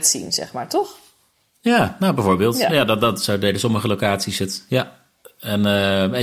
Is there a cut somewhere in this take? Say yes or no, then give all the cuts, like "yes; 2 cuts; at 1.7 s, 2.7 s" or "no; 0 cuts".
yes; 1 cut; at 2.7 s